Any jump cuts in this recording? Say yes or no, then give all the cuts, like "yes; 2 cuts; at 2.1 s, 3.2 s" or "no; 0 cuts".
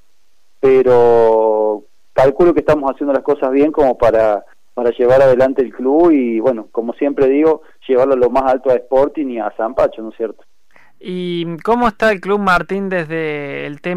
no; 0 cuts